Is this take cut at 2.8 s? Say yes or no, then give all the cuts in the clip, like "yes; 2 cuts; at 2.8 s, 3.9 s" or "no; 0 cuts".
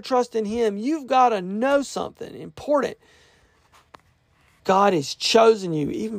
no; 1 cut; at 4.6 s